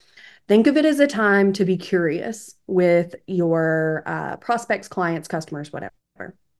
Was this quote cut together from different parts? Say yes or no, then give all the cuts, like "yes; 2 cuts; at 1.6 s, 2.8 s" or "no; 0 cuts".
no; 0 cuts